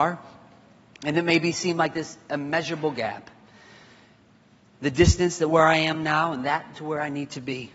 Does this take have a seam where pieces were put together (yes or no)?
no